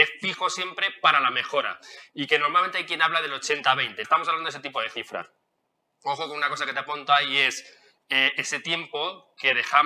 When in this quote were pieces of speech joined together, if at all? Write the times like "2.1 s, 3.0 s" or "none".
4.0 s